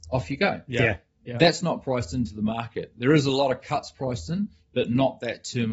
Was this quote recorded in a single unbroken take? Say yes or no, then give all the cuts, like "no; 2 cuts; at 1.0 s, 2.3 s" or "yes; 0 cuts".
yes; 0 cuts